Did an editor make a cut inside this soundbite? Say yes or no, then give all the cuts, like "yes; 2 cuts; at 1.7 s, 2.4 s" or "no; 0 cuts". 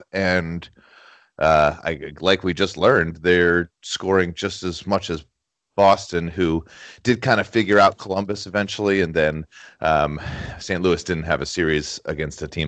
no; 0 cuts